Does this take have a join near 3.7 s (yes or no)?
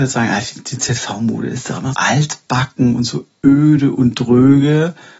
no